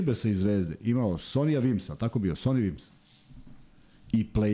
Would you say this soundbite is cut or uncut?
uncut